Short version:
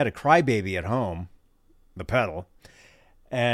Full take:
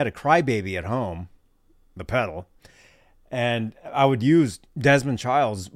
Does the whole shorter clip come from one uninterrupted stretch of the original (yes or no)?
yes